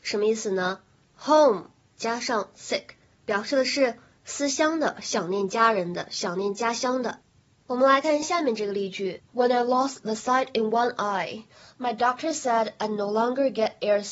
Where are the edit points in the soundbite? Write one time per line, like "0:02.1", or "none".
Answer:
0:08.2
0:09.3